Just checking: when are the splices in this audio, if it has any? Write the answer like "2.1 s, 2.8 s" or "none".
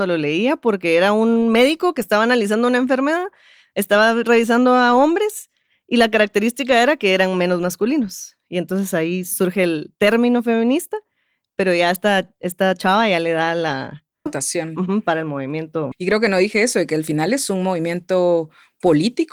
14.3 s, 15.9 s